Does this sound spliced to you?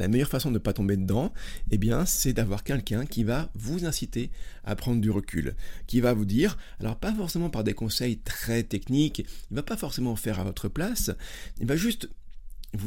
no; 0 cuts

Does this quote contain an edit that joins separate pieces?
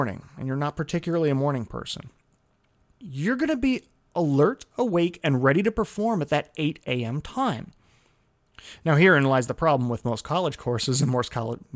yes; 1 cut; at 3.0 s

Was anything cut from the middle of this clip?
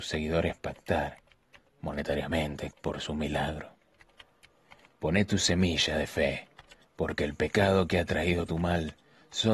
yes; 2 cuts; at 2.7 s, 4.9 s

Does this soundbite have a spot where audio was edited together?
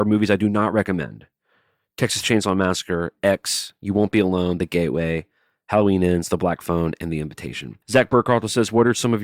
yes; 1 cut; at 7.8 s

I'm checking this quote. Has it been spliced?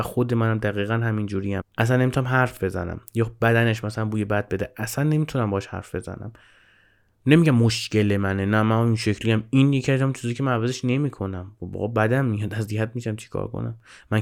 yes; 1 cut; at 1.6 s

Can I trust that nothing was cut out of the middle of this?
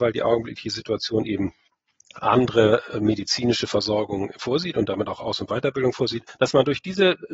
yes; 0 cuts

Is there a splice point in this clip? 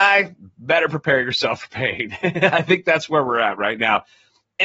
no; 0 cuts

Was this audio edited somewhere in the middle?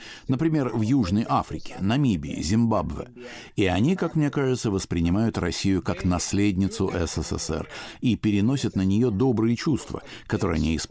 no; 0 cuts

